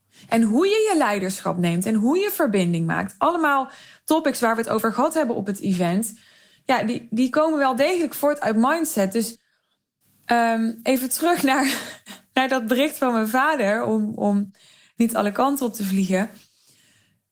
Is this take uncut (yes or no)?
yes